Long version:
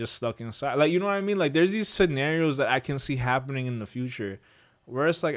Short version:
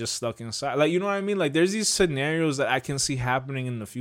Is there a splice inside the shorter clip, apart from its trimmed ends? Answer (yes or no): no